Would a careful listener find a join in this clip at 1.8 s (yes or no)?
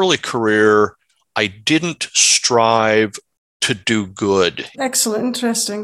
no